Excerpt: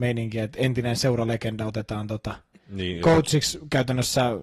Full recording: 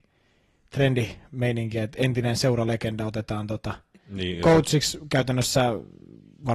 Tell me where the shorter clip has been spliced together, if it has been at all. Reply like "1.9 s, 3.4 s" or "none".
none